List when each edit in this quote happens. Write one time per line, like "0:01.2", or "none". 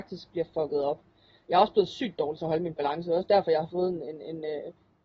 none